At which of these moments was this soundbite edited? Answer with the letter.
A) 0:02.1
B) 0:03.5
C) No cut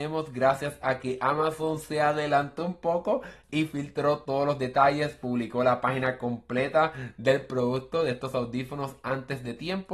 C